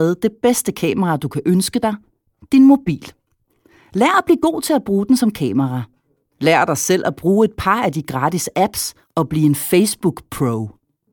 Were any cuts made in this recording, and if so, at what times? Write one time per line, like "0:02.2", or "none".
none